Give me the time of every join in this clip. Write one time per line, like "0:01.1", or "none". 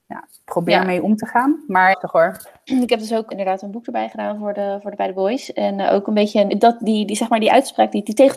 0:01.9
0:03.3
0:06.5

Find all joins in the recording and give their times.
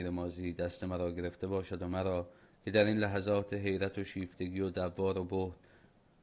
none

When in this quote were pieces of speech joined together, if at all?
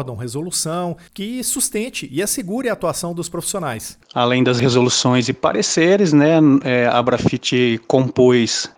0:04.0

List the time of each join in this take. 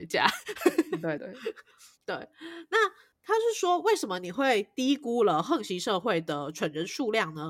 0:01.2

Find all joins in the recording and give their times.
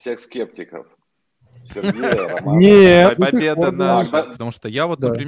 0:03.2
0:04.3

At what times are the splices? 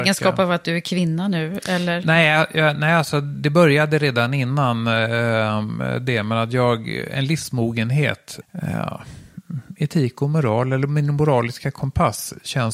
0:08.4

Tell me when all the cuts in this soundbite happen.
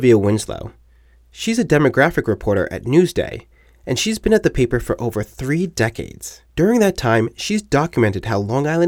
0:06.5

